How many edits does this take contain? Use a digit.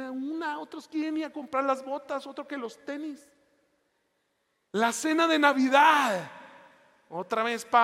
1